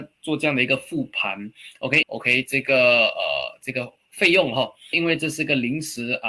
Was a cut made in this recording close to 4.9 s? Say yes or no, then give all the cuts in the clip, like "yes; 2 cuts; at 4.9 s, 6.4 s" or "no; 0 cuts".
yes; 2 cuts; at 2.0 s, 4.9 s